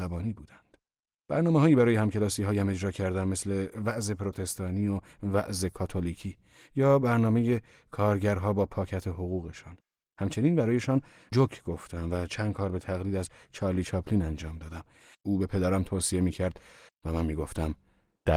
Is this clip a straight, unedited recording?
no; 3 cuts; at 1.1 s, 15.1 s, 16.9 s

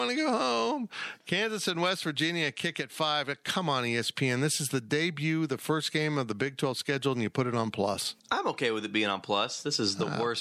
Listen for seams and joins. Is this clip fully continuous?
no; 1 cut; at 8.2 s

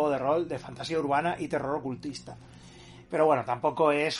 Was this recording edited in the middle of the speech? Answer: yes; 1 cut; at 3.0 s

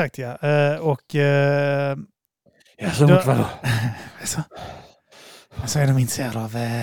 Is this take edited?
no; 0 cuts

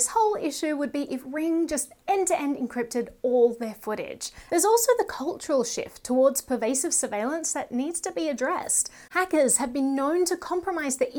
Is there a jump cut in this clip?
yes; 2 cuts; at 4.5 s, 9.1 s

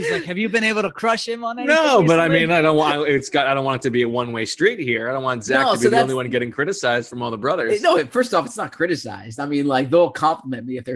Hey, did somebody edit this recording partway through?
no; 0 cuts

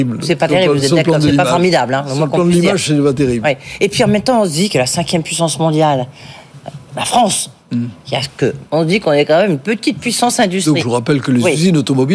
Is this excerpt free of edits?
no; 2 cuts; at 8.6 s, 10.8 s

